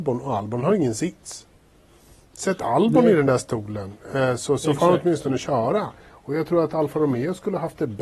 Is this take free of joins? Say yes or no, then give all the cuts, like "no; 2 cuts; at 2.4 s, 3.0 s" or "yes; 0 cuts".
yes; 0 cuts